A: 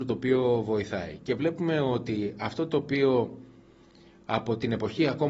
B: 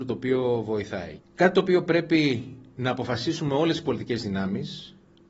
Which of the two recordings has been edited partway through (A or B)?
B